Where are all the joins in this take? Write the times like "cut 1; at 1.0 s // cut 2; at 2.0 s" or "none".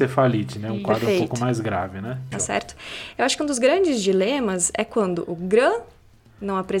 cut 1; at 2.3 s